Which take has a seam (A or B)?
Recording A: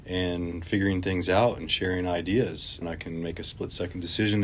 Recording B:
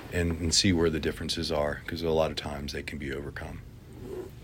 A